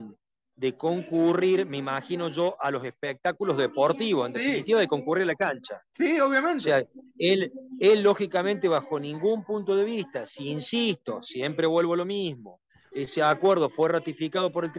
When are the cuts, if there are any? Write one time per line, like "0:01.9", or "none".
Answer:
none

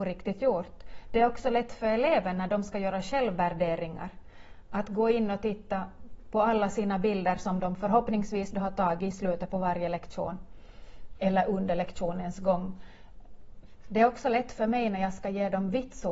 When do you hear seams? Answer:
0:13.8

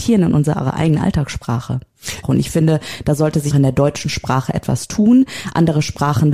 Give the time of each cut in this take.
0:02.2
0:03.5

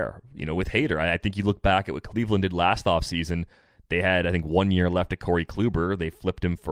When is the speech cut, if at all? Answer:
none

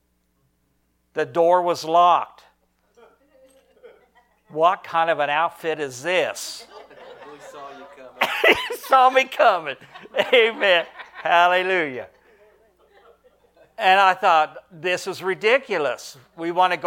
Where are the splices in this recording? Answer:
none

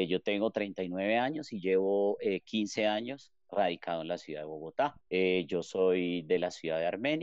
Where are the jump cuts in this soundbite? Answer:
0:05.0

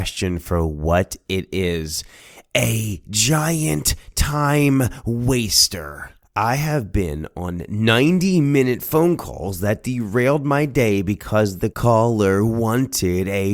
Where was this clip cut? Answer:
0:06.2

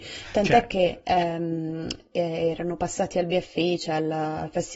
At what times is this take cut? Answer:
0:02.1

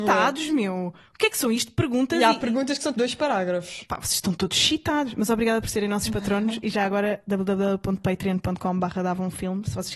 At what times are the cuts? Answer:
0:02.9

